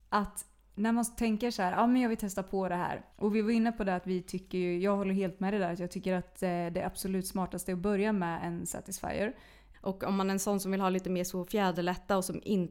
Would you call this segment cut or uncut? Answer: cut